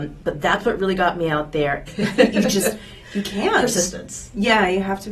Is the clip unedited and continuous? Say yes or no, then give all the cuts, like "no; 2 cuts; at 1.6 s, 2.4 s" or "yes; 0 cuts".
no; 1 cut; at 1.9 s